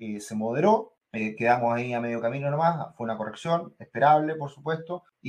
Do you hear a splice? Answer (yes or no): no